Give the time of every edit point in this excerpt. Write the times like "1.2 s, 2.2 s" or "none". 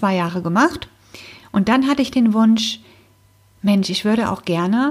none